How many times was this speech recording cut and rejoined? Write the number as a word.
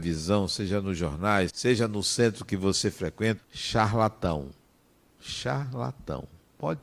two